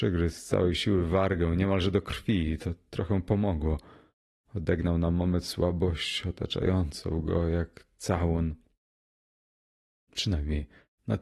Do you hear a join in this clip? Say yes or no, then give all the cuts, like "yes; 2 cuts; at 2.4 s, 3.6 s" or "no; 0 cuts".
no; 0 cuts